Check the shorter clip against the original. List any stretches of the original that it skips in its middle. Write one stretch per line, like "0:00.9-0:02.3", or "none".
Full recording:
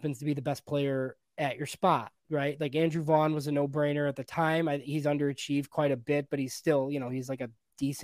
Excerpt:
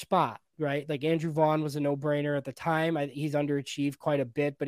none

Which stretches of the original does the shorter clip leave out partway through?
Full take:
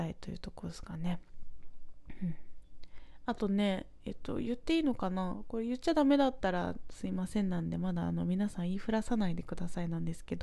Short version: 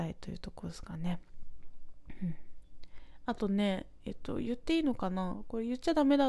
none

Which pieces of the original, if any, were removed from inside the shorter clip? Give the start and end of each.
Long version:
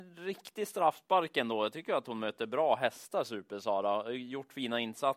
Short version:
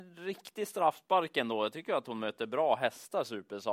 none

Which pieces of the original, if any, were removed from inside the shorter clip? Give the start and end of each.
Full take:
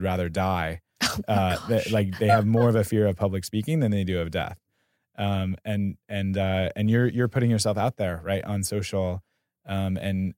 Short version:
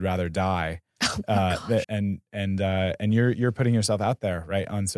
0:01.8-0:05.6

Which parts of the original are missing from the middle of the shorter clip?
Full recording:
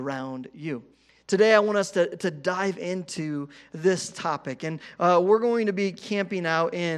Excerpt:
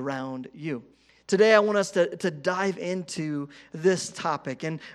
none

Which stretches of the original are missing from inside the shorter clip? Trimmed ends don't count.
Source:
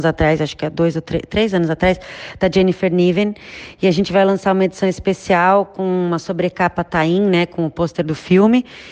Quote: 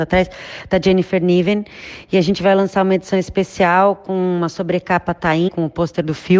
0:07.2-0:07.5

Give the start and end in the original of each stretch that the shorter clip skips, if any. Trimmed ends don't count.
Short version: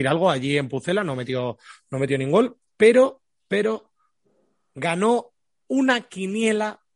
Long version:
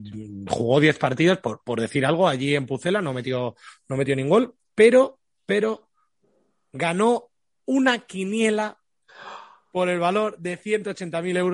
none

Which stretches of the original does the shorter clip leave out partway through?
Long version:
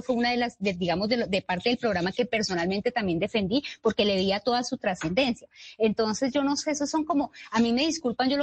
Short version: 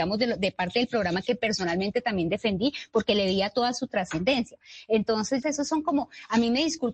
0:06.3-0:06.6

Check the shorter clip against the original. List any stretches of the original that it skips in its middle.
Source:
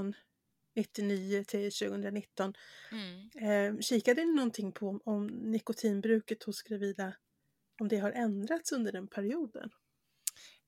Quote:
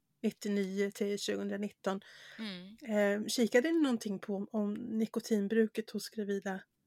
none

